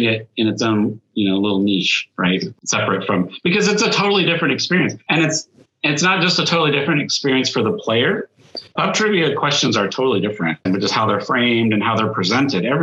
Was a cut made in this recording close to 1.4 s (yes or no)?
no